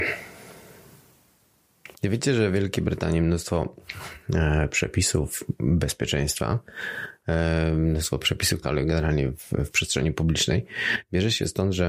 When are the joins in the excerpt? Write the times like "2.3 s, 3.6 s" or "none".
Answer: 1.9 s, 8.6 s